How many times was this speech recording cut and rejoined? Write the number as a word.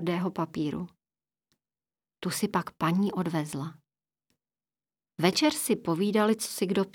zero